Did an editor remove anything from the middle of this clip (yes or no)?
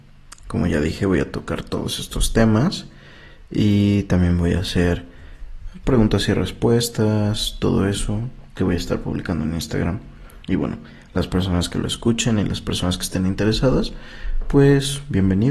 no